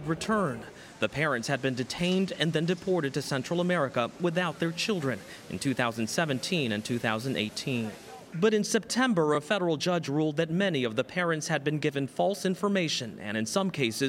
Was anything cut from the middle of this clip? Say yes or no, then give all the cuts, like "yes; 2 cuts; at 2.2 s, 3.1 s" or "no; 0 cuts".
no; 0 cuts